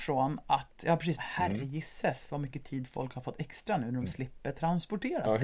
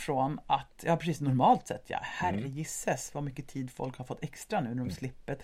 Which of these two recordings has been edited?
first; 1 cut; at 1.2 s

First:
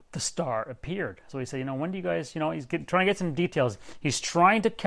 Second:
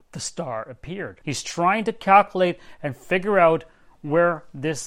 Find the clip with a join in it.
second; 1 cut; at 1.2 s

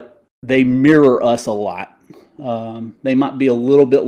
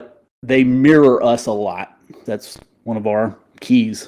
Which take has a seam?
second; 1 cut; at 2.3 s

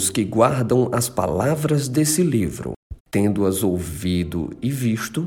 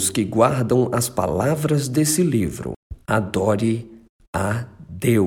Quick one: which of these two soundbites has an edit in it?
first; 1 cut; at 3.0 s

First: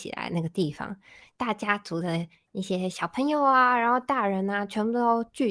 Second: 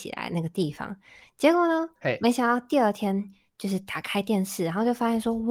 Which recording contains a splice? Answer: first; 1 cut; at 1.3 s

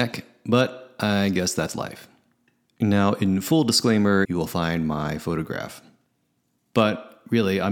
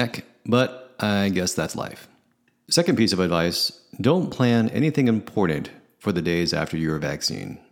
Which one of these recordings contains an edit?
first; 2 cuts; at 2.6 s, 4.2 s

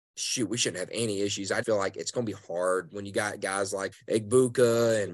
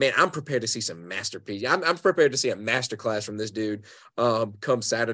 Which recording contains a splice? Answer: first; 2 cuts; at 1.6 s, 3.9 s

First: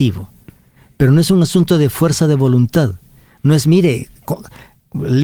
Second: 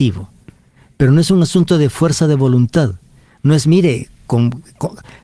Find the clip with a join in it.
first; 1 cut; at 4.2 s

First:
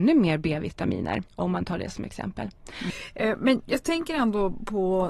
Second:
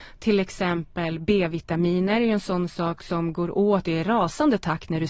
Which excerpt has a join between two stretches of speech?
first; 1 cut; at 1.3 s

